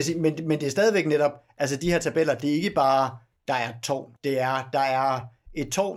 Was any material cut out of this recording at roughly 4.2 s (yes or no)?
yes